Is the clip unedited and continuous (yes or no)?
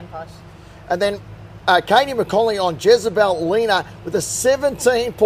yes